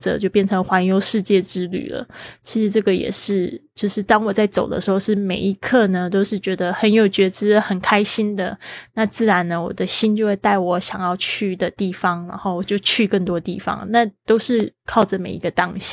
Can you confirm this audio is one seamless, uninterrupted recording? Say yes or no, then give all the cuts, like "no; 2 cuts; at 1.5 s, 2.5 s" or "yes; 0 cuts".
yes; 0 cuts